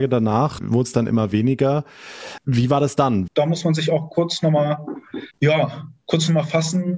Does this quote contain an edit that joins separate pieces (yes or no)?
yes